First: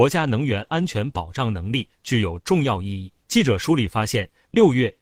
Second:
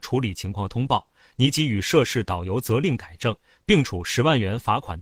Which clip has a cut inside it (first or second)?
first